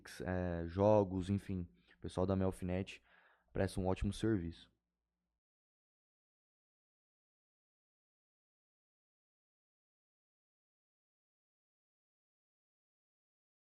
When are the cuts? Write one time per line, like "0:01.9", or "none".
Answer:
none